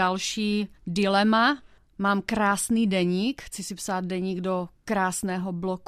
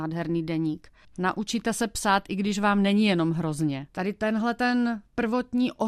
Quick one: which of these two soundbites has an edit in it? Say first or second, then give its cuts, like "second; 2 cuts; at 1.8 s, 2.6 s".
second; 2 cuts; at 1.0 s, 3.9 s